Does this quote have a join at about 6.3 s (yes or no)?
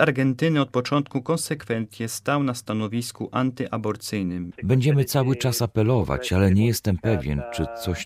no